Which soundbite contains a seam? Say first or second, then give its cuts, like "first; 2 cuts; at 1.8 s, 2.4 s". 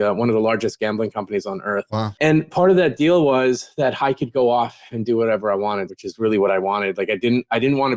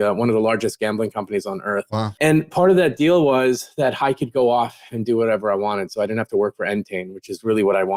first; 1 cut; at 5.9 s